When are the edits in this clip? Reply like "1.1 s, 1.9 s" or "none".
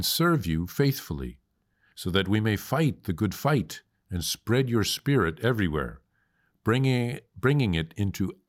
none